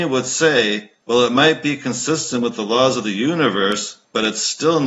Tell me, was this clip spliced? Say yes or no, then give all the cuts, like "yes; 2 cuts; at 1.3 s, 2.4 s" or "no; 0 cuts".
no; 0 cuts